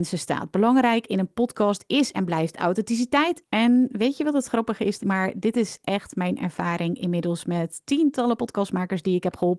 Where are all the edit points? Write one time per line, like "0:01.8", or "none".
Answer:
0:03.4
0:05.0